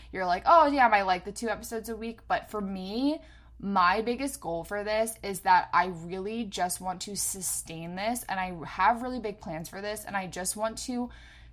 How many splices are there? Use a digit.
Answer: 0